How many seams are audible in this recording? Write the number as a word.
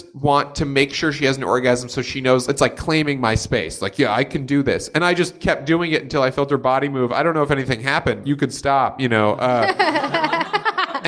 one